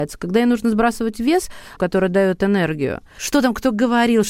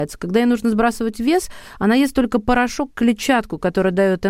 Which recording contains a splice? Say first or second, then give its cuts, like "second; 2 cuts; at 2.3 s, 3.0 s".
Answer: first; 2 cuts; at 1.8 s, 3.2 s